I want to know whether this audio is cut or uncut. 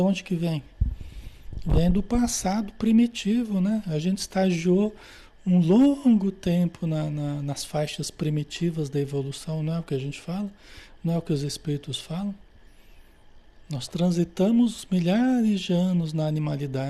uncut